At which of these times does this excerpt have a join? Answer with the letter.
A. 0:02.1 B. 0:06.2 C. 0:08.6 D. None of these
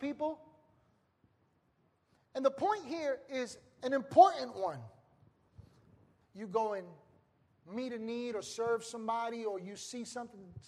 B